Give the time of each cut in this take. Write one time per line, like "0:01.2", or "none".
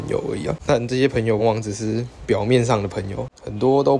0:01.4